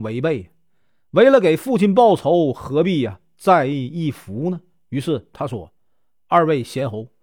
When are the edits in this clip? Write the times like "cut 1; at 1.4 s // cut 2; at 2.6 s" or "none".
none